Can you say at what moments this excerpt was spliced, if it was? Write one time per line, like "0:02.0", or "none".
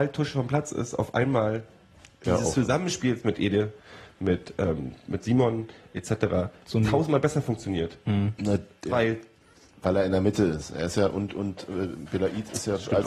none